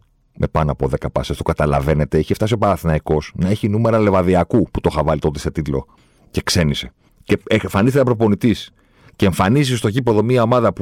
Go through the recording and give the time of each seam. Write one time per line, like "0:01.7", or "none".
none